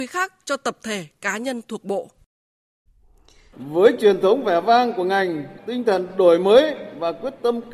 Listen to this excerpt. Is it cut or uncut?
cut